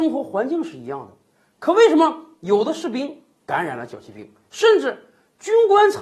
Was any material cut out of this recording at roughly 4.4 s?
yes; 1 cut; at 4.4 s

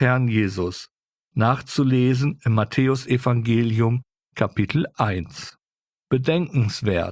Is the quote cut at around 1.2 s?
no; 0 cuts

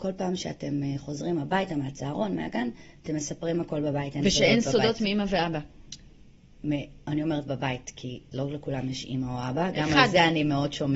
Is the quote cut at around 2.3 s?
no; 0 cuts

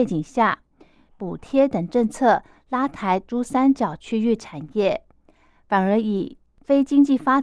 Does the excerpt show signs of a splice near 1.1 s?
yes; 1 cut; at 1.1 s

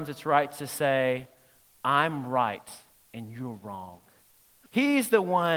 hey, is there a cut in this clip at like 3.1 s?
no; 1 cut; at 4.7 s

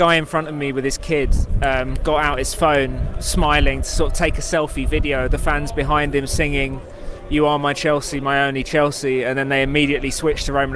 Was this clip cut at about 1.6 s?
no; 0 cuts

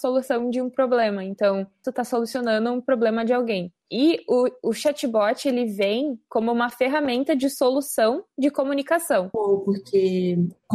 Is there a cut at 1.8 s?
yes; 2 cuts; at 1.8 s, 9.3 s

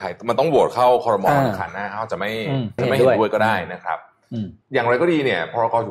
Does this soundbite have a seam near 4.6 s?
yes; 2 cuts; at 2.8 s, 4.6 s

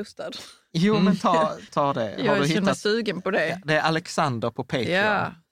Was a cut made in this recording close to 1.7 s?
yes; 1 cut; at 1.7 s

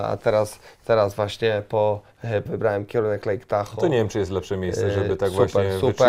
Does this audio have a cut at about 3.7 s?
no; 1 cut; at 2.5 s

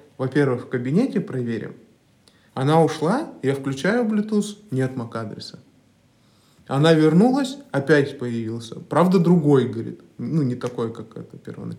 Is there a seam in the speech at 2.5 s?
yes; 1 cut; at 2.5 s

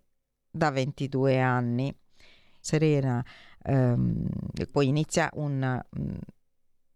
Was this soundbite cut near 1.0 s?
no; 2 cuts; at 2.6 s, 4.7 s

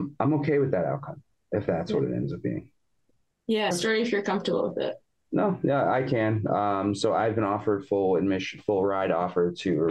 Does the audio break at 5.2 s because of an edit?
no; 1 cut; at 3.7 s

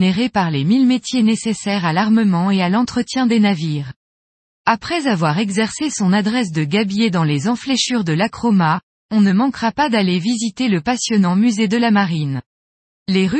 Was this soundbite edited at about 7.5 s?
no; 1 cut; at 4.6 s

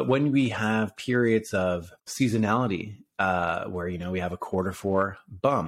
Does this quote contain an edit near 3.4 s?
no; 1 cut; at 2.0 s

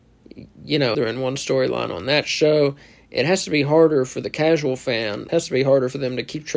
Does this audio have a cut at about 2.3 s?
no; 2 cuts; at 0.9 s, 5.3 s

